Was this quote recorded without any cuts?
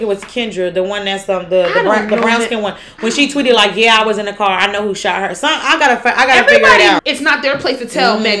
no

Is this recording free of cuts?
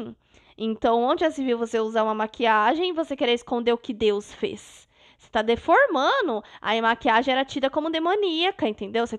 yes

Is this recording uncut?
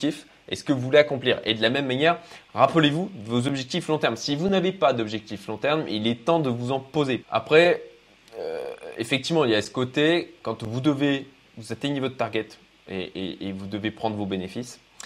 no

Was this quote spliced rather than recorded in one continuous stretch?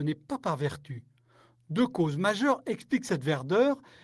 no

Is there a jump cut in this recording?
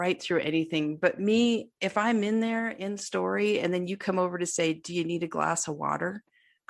no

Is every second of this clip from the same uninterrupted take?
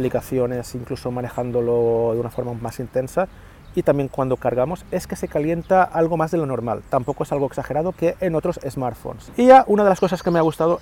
no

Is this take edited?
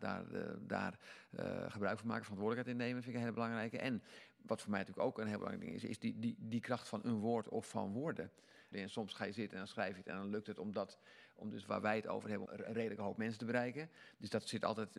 yes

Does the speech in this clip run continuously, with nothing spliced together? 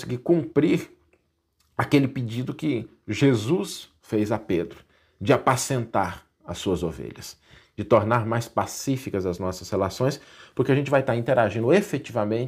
yes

